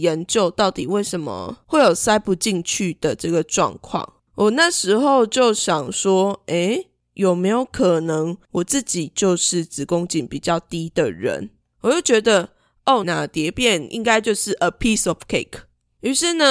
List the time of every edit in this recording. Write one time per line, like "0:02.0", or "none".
0:04.3
0:11.6
0:13.0